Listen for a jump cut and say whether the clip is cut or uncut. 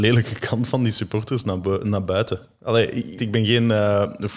cut